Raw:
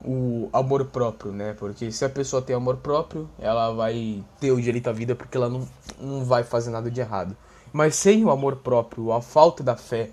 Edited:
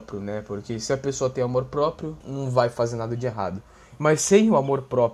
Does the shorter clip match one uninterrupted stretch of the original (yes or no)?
no